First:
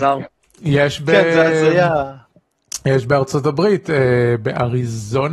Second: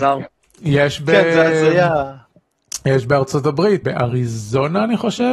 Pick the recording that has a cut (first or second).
second